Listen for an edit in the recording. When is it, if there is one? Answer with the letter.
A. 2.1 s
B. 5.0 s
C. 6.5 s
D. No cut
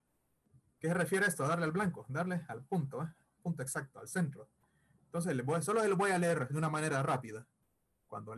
C